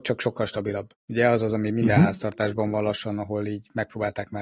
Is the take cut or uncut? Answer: uncut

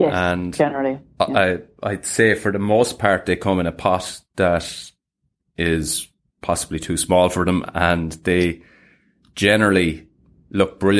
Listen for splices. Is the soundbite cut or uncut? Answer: uncut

